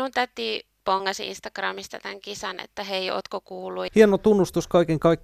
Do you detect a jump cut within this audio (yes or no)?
yes